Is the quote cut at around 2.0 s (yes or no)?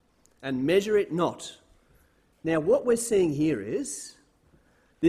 no